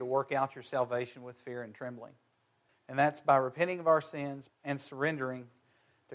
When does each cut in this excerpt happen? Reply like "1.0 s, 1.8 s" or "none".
2.7 s, 4.5 s